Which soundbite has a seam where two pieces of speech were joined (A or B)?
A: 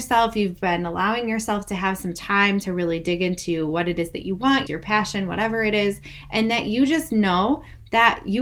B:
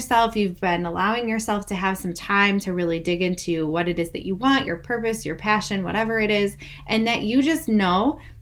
A